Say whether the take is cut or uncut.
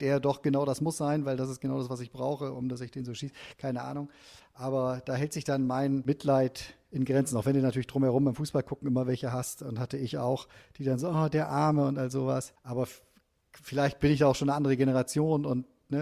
cut